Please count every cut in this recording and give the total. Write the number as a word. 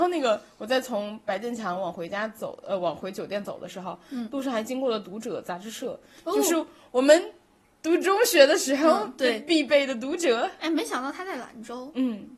zero